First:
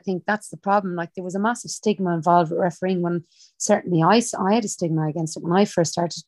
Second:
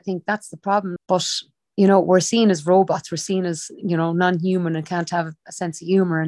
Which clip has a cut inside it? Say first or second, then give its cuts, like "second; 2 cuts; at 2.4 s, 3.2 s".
second; 1 cut; at 1.0 s